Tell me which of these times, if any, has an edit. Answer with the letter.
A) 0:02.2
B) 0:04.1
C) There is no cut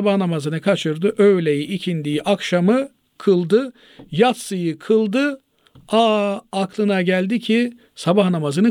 C